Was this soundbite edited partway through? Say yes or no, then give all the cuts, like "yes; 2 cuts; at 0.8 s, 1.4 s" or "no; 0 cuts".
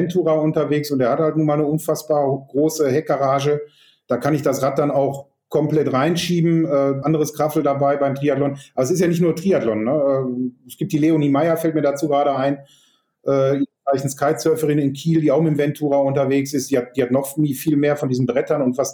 yes; 1 cut; at 7.0 s